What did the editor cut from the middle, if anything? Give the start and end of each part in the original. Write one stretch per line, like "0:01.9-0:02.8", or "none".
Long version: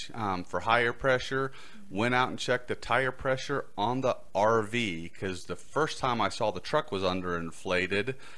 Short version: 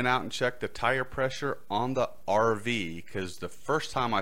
none